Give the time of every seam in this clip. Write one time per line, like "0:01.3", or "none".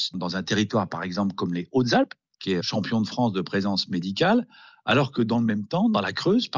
0:02.6